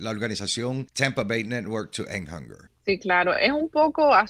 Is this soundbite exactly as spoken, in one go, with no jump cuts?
yes; 0 cuts

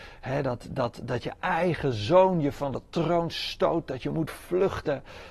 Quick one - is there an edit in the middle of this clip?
no; 0 cuts

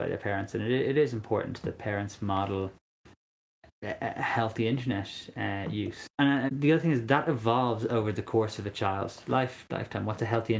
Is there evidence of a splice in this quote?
yes; 1 cut; at 6.5 s

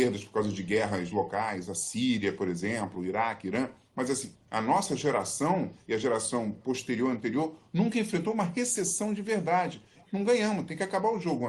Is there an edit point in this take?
yes; 2 cuts; at 4.3 s, 10.0 s

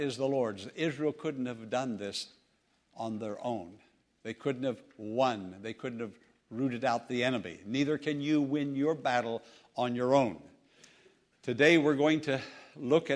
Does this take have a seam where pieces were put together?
no; 0 cuts

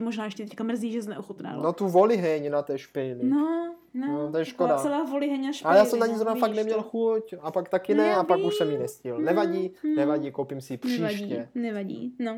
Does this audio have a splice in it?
no; 0 cuts

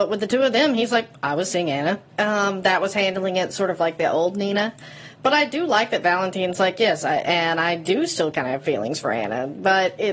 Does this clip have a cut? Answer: yes; 2 cuts; at 2.1 s, 7.2 s

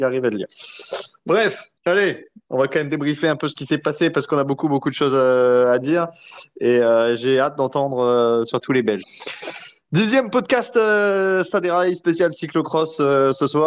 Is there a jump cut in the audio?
yes; 2 cuts; at 1.8 s, 9.0 s

